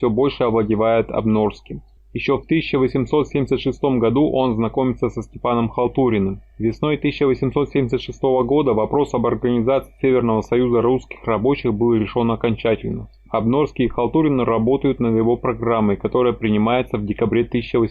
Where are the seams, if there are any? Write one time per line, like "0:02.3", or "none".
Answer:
0:02.0

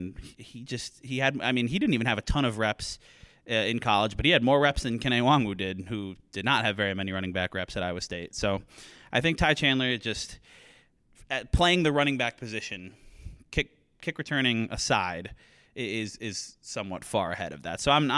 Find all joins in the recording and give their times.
none

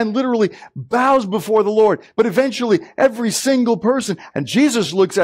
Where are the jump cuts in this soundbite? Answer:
0:02.1
0:04.3

